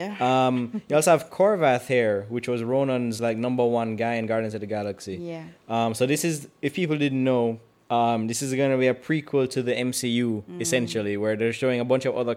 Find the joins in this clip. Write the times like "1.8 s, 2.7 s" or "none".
none